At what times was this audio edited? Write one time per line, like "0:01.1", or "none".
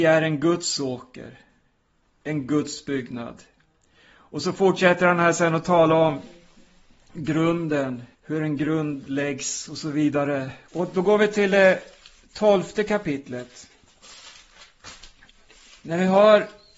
0:08.1
0:10.7